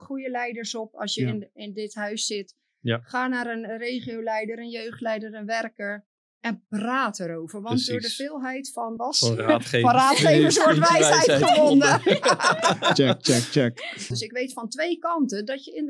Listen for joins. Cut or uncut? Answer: cut